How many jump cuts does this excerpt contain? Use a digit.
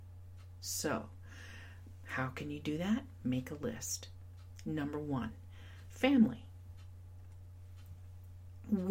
1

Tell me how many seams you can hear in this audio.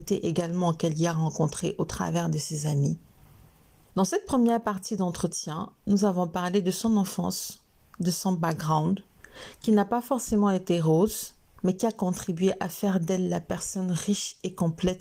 1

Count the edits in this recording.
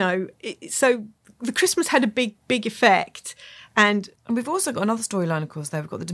1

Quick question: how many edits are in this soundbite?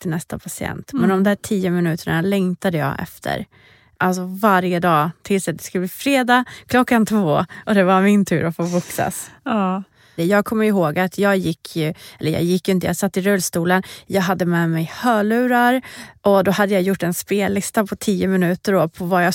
2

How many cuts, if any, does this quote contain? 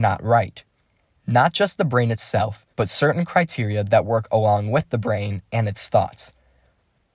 2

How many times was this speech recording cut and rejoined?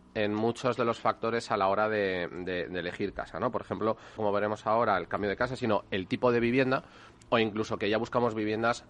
1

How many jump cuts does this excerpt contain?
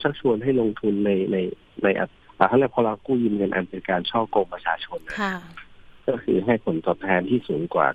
1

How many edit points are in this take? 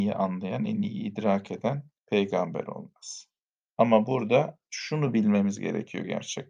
2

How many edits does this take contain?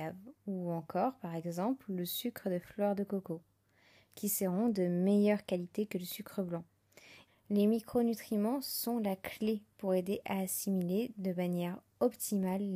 1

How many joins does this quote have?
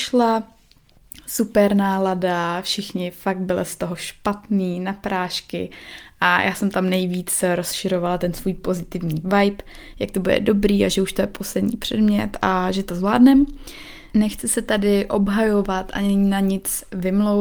1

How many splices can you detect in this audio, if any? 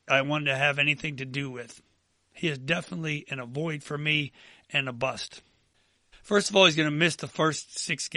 1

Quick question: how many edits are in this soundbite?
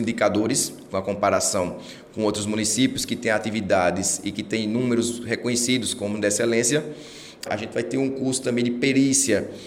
1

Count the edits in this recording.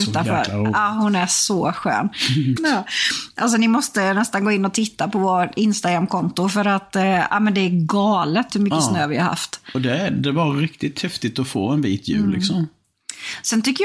1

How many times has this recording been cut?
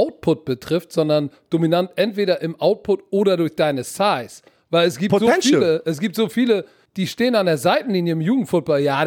1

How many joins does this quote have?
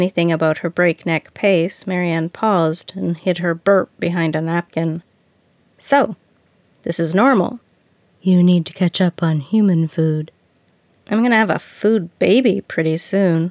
0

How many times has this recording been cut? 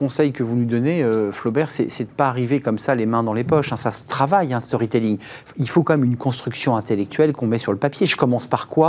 0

